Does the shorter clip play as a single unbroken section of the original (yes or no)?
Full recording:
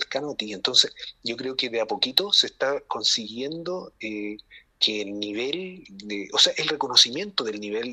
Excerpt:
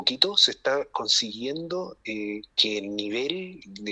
no